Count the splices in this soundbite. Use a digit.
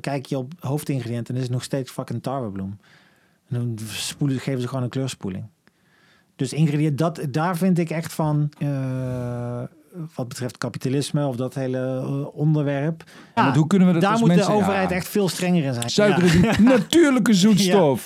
3